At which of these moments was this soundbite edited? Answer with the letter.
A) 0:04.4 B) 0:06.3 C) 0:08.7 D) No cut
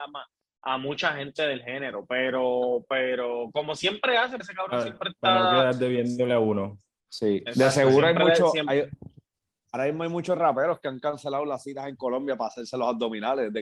A